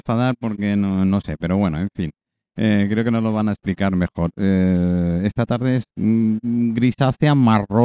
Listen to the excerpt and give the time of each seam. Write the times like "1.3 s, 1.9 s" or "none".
none